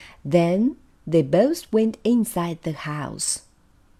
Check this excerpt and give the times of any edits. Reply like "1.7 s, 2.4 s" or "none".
none